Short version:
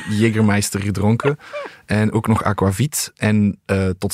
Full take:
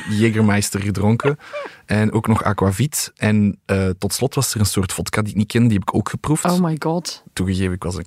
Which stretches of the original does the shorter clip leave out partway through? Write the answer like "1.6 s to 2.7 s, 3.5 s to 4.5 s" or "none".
none